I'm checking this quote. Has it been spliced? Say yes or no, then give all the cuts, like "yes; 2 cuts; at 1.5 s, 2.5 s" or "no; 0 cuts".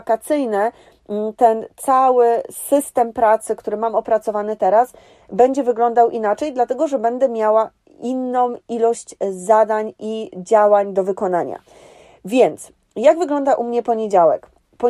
no; 0 cuts